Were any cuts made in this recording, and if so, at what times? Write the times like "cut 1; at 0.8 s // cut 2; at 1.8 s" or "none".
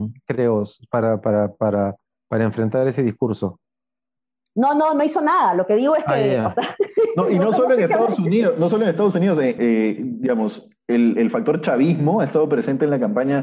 cut 1; at 9.6 s